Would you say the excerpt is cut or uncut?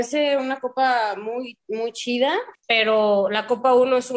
cut